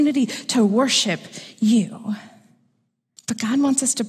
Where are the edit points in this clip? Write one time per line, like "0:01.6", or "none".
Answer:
0:03.2